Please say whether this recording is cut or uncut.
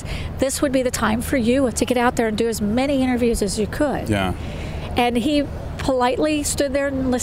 cut